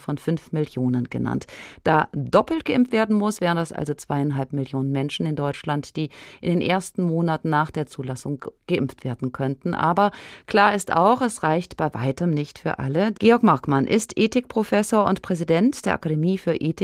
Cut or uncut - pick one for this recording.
cut